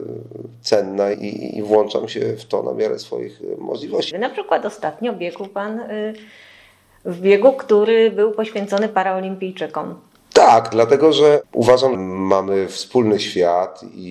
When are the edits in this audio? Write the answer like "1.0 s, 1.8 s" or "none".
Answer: 1.1 s, 4.1 s, 12.0 s